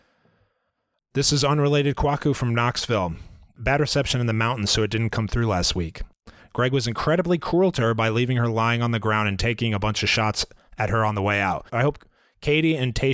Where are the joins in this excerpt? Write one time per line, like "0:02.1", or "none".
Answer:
0:06.4
0:11.7